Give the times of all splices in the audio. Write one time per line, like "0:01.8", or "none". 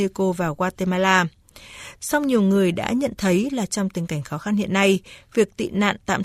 0:02.0

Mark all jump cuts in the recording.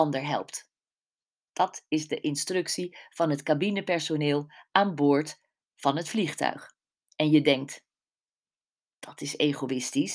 none

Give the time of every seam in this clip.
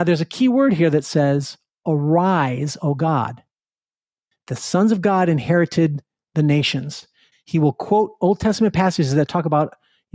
0:04.3
0:07.3

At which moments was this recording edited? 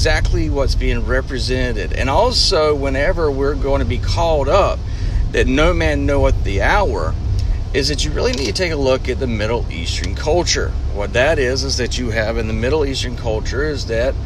none

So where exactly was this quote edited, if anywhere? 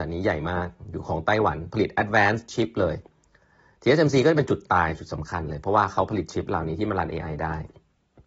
none

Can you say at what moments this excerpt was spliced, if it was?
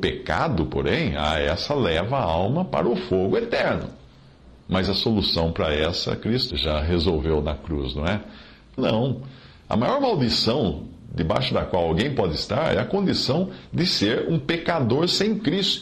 0:06.5
0:08.8

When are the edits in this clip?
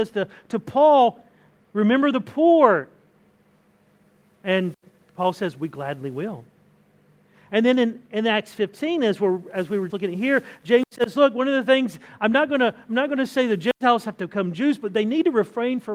0:09.9

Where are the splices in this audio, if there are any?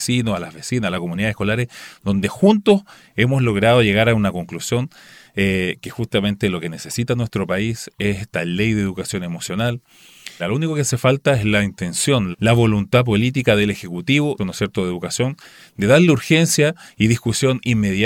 0:10.4
0:12.3
0:14.4

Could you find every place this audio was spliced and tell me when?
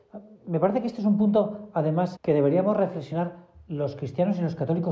0:02.2

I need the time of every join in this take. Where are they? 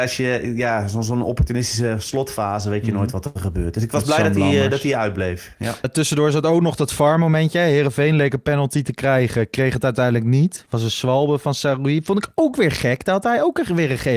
0:05.8

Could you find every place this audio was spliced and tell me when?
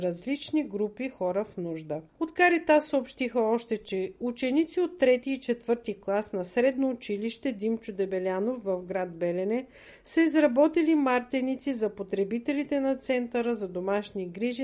0:02.1

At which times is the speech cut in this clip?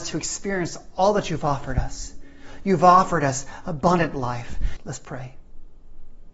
0:04.8

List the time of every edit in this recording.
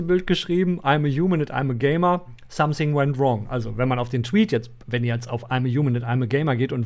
none

